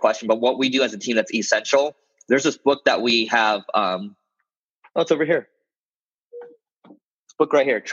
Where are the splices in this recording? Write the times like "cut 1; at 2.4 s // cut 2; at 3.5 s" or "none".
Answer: none